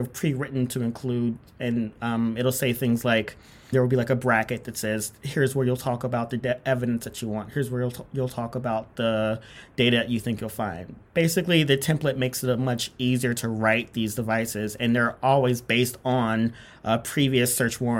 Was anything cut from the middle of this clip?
yes; 1 cut; at 3.7 s

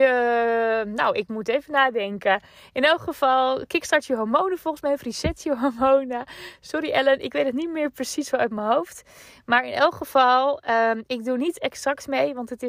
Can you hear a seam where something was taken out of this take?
no; 0 cuts

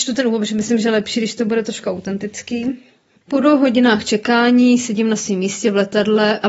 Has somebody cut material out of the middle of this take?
no; 0 cuts

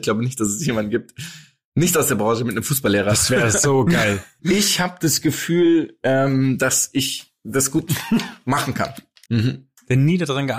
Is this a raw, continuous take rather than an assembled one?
no; 2 cuts; at 4.4 s, 9.3 s

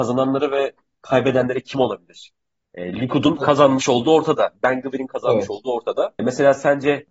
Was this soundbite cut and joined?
no; 0 cuts

